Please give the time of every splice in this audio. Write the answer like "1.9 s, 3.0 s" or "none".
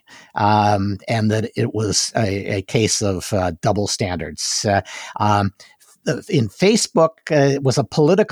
none